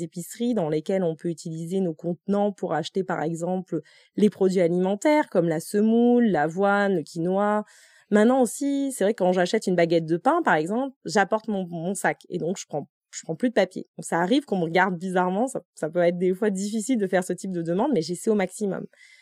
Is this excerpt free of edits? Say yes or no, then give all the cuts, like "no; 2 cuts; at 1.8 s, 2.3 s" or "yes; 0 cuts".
yes; 0 cuts